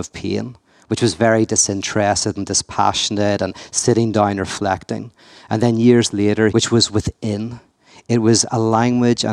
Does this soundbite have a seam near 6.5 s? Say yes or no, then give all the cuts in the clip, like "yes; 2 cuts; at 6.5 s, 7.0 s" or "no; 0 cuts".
yes; 1 cut; at 6.5 s